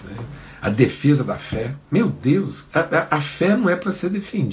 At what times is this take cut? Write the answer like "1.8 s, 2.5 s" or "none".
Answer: 2.7 s